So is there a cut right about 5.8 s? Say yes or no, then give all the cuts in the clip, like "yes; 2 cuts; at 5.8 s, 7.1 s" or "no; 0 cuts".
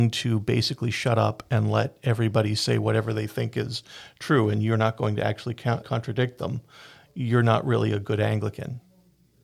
yes; 1 cut; at 5.8 s